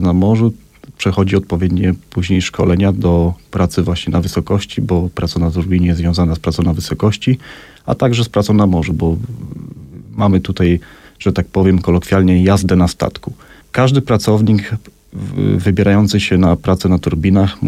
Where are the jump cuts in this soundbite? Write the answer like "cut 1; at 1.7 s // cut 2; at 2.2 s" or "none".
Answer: none